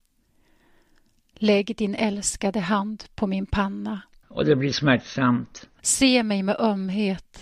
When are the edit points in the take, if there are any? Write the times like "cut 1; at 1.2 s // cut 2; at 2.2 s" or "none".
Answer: cut 1; at 4.2 s // cut 2; at 5.8 s

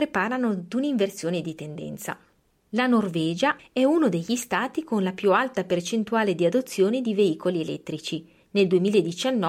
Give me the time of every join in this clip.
cut 1; at 3.6 s

